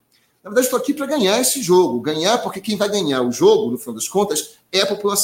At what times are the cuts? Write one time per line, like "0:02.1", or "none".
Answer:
none